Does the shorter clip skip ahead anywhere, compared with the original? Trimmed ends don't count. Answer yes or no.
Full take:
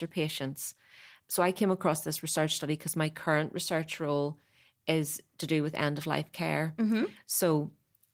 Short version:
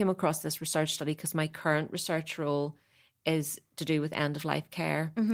no